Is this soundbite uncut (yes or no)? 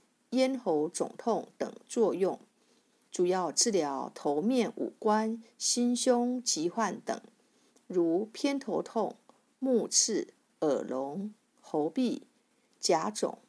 yes